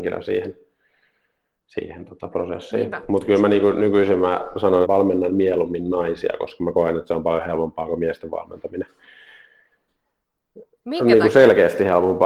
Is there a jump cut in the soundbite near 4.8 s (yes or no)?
yes